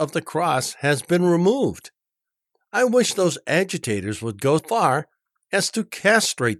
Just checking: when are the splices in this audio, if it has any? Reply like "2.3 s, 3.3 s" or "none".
4.6 s

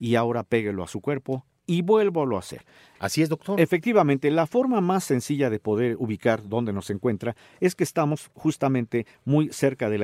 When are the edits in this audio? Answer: 3.0 s

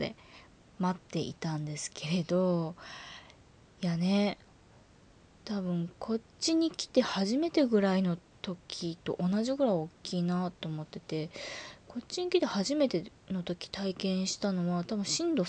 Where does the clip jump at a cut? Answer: none

